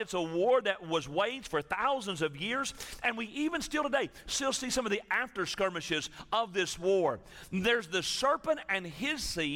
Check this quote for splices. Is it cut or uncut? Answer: uncut